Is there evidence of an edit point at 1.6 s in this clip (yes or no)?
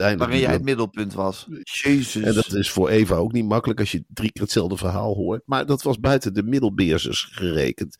yes